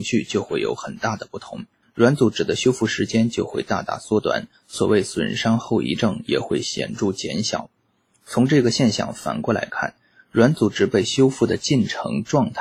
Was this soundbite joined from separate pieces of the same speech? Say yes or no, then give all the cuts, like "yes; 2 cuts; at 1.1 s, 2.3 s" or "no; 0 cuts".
yes; 1 cut; at 1.8 s